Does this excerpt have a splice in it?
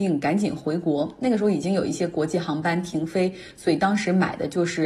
no; 0 cuts

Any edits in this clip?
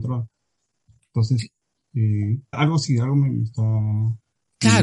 yes; 1 cut; at 2.5 s

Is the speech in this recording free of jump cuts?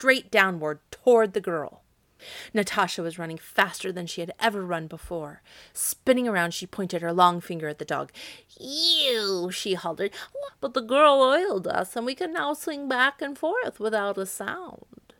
no; 2 cuts; at 5.7 s, 10.5 s

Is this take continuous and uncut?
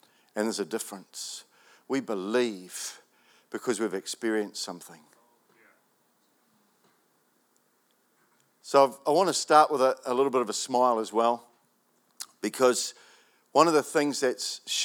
yes; 0 cuts

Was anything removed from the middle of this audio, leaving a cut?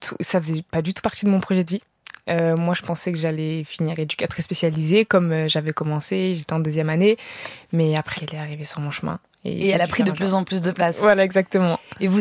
yes; 1 cut; at 8.2 s

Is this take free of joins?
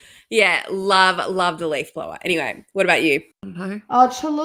no; 1 cut; at 3.3 s

